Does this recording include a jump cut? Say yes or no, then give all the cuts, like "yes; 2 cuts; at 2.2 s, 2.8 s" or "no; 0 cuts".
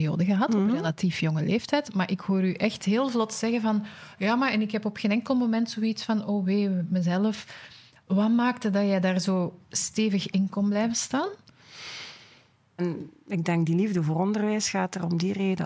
yes; 1 cut; at 12.8 s